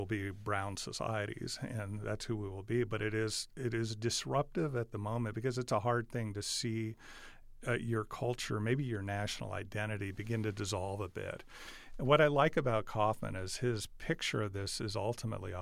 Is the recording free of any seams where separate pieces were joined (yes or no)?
yes